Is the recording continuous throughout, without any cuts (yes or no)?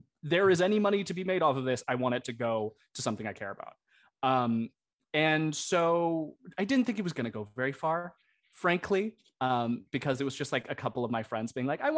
yes